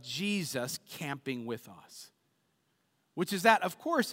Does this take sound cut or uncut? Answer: uncut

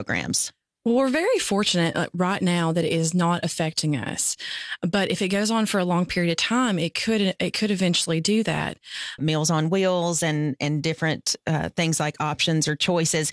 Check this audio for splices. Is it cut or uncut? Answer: cut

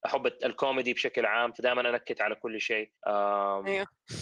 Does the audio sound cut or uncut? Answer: cut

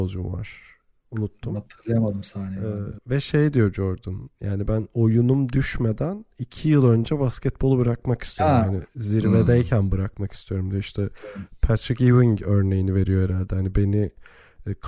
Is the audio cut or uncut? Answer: uncut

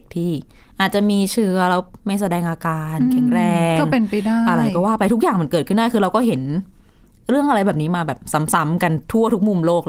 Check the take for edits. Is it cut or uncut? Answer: uncut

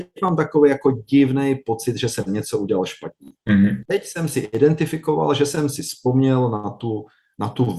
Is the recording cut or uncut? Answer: cut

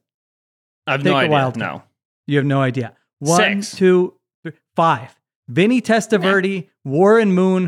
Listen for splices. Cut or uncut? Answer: uncut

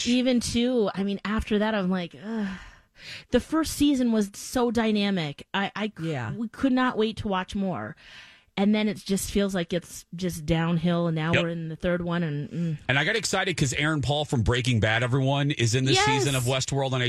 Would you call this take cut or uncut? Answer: uncut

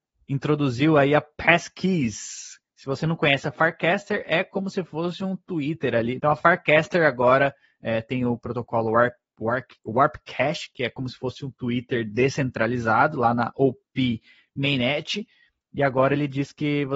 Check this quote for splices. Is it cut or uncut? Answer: cut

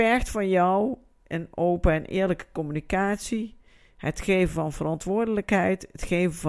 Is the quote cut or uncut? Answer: uncut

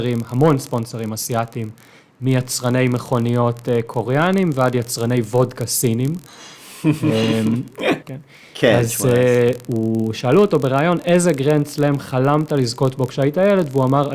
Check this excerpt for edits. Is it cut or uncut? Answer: cut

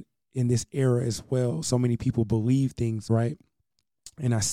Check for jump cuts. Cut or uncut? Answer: cut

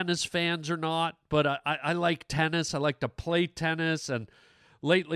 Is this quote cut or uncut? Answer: uncut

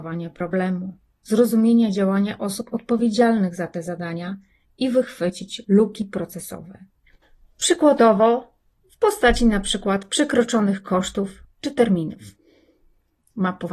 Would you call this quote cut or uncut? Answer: uncut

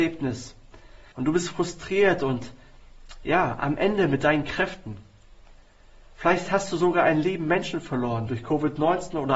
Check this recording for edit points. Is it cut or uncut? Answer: cut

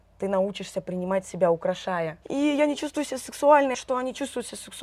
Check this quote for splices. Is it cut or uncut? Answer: cut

